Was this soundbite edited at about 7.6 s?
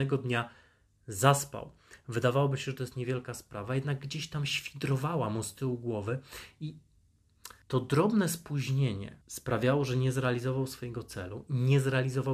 yes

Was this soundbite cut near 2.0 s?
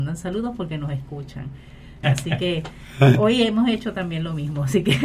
yes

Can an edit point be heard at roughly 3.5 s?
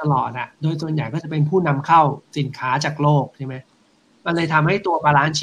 no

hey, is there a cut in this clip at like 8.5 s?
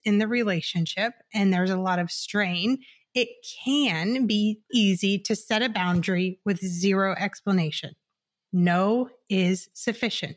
yes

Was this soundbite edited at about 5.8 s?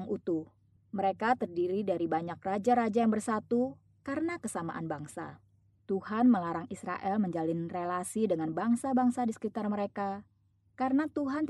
yes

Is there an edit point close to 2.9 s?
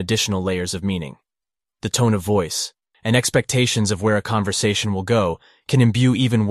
yes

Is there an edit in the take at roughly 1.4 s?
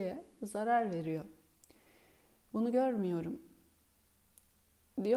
no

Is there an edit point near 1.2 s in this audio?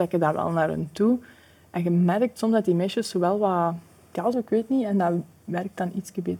no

